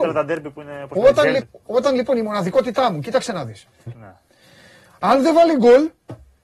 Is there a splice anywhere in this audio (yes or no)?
yes